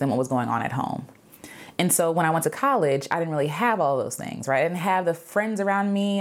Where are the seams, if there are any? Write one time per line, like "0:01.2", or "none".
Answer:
none